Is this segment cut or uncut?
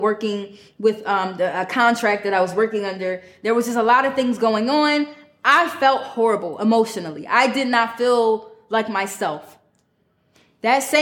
uncut